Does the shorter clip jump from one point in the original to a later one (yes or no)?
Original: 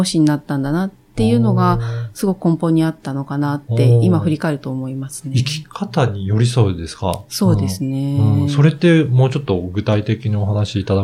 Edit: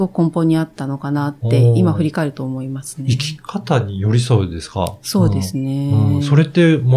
no